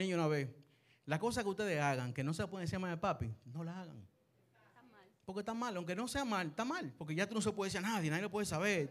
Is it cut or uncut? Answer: uncut